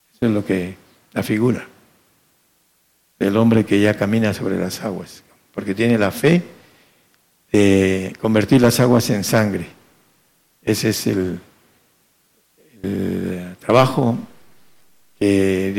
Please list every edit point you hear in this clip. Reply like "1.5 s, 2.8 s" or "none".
none